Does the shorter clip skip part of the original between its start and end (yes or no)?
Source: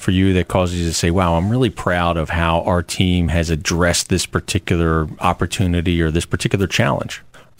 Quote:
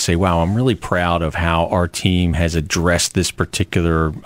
no